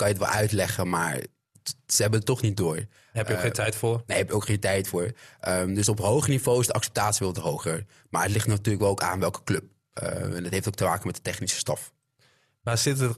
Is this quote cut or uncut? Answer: uncut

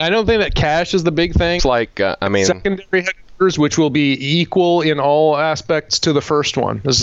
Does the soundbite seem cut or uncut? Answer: cut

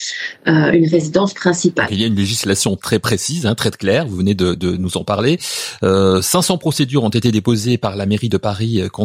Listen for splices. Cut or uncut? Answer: uncut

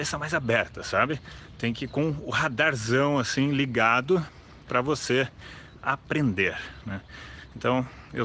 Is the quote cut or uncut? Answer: uncut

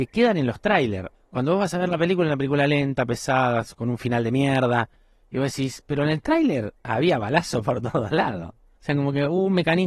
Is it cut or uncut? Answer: cut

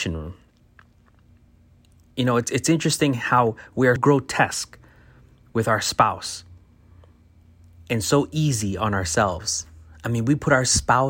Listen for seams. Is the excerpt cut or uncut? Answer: cut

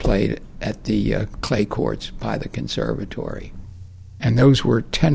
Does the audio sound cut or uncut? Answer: cut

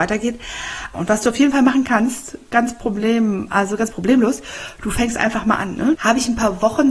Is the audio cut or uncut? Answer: cut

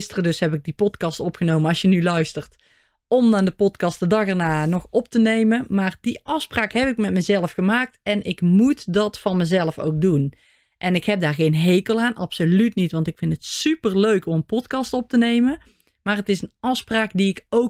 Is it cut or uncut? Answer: uncut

